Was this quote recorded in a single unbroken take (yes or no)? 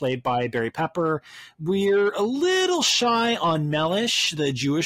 yes